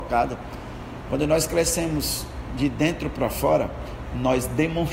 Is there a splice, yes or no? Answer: yes